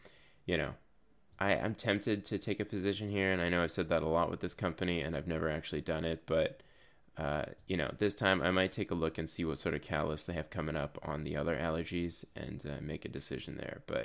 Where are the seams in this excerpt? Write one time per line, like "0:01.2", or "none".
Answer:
none